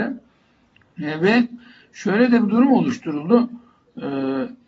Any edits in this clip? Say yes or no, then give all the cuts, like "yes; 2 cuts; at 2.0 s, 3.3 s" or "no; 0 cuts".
yes; 1 cut; at 1.0 s